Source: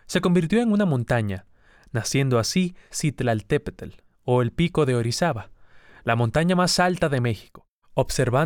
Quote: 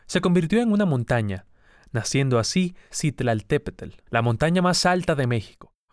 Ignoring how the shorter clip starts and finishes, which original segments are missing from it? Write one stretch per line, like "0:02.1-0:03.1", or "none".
0:04.1-0:06.0